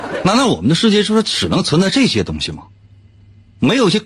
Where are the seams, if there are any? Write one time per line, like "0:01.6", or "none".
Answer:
none